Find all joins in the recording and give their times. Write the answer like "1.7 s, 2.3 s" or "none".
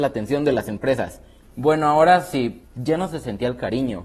1.4 s, 2.6 s